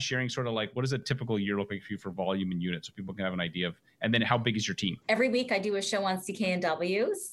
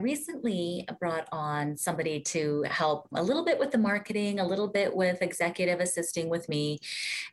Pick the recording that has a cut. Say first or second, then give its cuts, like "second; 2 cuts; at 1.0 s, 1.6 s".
first; 1 cut; at 5.0 s